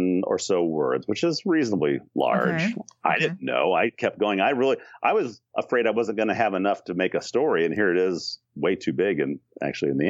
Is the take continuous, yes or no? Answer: yes